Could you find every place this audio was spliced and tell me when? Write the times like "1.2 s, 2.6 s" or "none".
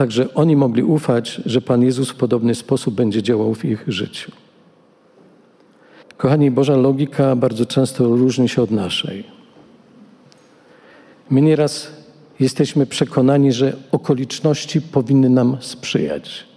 6.0 s